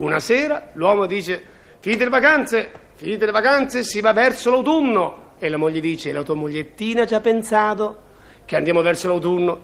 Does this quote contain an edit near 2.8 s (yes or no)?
no